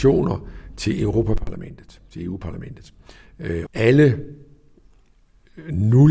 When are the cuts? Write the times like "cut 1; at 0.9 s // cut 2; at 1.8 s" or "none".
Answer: cut 1; at 3.7 s